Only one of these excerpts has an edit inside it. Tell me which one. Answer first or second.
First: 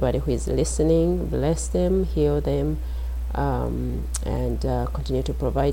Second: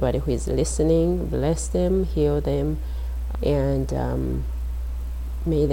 second